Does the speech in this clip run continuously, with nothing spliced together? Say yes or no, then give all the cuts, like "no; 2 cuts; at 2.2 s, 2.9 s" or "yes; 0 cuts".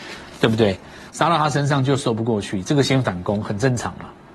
no; 1 cut; at 1.1 s